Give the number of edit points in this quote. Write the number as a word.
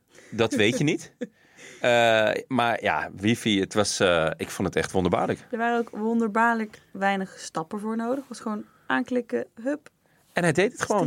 zero